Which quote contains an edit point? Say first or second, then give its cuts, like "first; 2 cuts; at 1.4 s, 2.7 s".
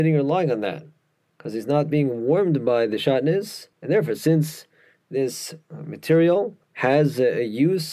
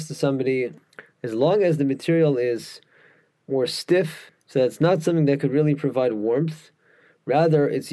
first; 2 cuts; at 3.7 s, 6.6 s